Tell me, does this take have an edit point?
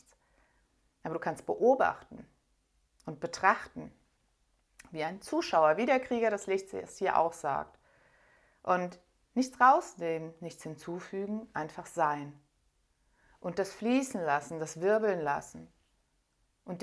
no; 0 cuts

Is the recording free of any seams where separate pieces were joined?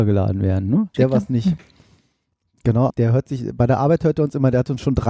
no; 2 cuts; at 0.9 s, 2.9 s

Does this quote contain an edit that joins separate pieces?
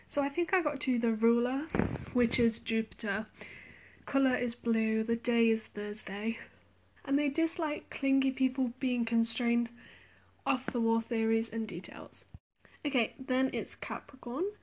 yes; 1 cut; at 7.0 s

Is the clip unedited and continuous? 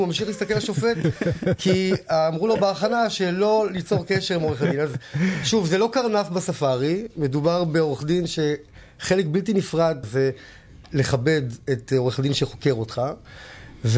no; 1 cut; at 10.0 s

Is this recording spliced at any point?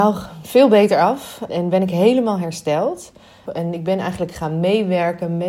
yes; 2 cuts; at 1.5 s, 3.4 s

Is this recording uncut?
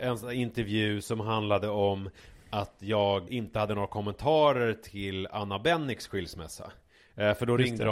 no; 1 cut; at 3.3 s

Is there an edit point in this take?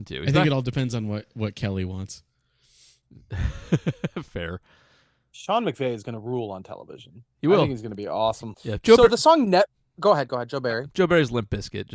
yes; 1 cut; at 8.5 s

